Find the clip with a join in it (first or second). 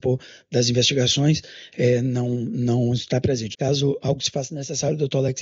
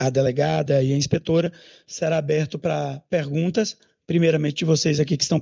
first